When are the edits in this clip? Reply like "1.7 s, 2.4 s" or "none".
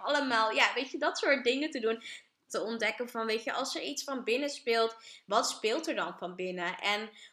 2.5 s